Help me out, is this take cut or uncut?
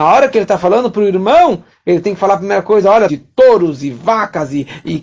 cut